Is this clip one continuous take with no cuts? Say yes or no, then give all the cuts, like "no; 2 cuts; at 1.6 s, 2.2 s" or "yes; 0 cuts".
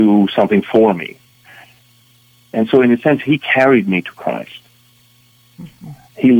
yes; 0 cuts